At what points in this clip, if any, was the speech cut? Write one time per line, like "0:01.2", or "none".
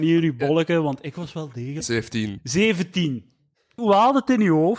0:01.8
0:03.8